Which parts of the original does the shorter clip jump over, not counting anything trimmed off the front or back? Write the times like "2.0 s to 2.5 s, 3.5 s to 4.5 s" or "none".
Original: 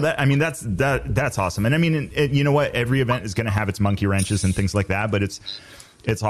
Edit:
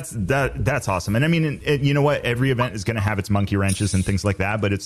none